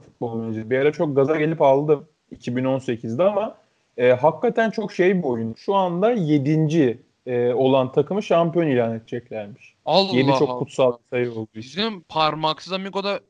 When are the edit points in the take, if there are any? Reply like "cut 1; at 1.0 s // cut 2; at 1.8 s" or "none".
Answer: cut 1; at 5.5 s

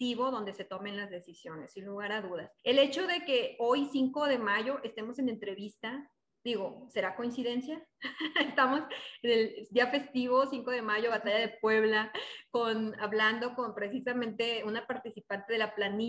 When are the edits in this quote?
cut 1; at 2.6 s

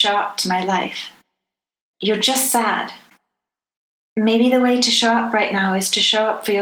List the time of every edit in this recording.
cut 1; at 1.9 s

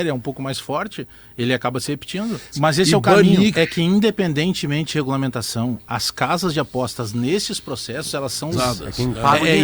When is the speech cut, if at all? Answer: cut 1; at 2.5 s // cut 2; at 3.5 s // cut 3; at 8.5 s

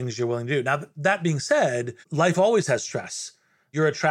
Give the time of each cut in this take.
cut 1; at 2.0 s

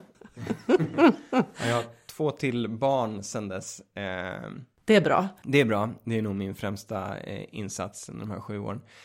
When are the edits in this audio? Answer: none

